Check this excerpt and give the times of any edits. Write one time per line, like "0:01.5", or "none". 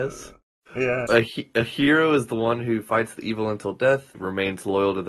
0:01.1
0:04.1